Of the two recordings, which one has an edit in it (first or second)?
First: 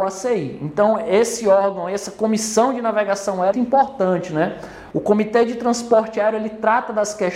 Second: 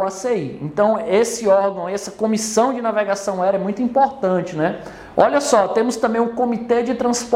first